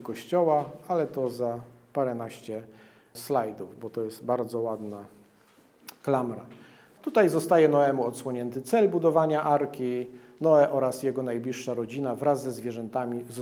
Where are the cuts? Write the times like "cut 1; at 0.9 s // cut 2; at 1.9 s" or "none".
none